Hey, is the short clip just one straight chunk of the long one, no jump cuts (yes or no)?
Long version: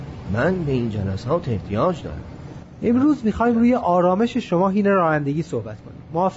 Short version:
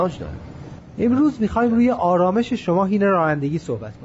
yes